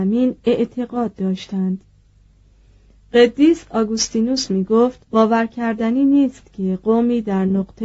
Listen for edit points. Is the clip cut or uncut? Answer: cut